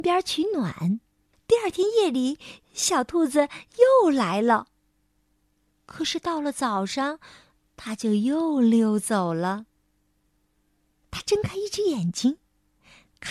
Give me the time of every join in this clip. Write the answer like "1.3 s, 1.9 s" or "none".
1.3 s, 11.0 s